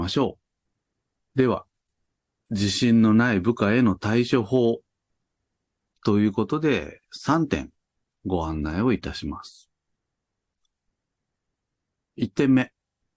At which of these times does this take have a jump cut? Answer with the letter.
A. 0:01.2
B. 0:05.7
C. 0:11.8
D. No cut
A